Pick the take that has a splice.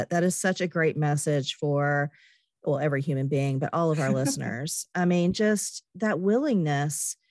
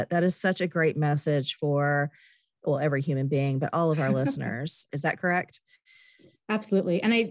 second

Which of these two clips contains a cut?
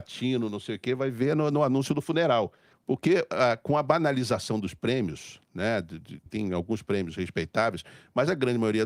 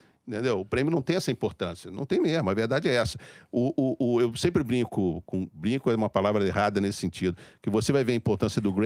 first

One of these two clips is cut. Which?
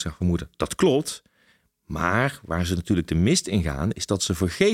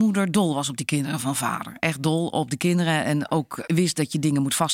second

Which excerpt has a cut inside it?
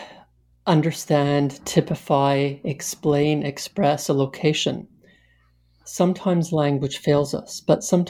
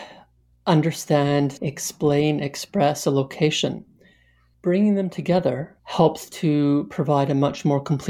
second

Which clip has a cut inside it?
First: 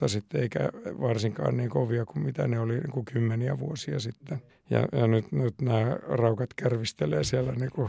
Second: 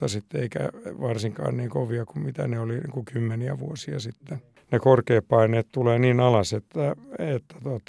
first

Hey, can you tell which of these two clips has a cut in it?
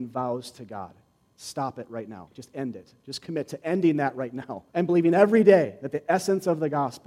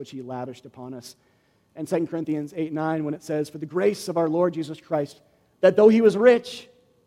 first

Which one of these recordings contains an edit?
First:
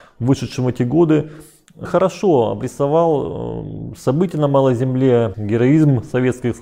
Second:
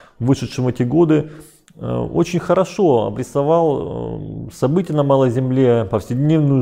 first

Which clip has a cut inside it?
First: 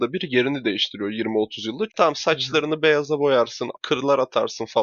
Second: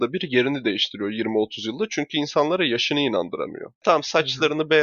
first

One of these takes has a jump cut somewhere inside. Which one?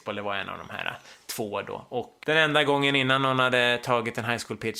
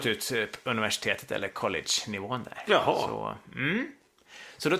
first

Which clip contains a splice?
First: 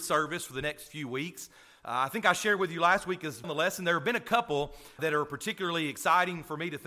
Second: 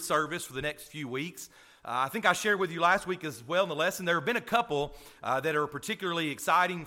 first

